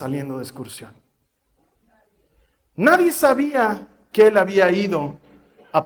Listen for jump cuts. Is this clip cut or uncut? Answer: uncut